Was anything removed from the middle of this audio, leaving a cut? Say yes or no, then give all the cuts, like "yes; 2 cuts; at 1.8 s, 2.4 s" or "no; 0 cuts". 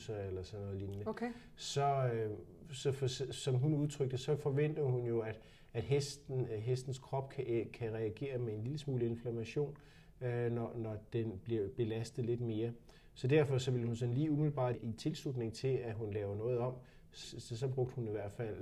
yes; 2 cuts; at 14.7 s, 17.2 s